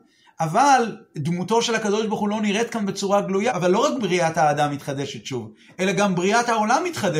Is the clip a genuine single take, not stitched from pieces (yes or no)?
no